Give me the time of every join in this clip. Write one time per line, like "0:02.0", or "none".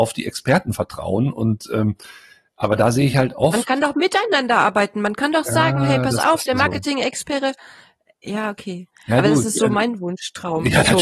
none